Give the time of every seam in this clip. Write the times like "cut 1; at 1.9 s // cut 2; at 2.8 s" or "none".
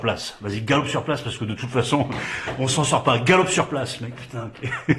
none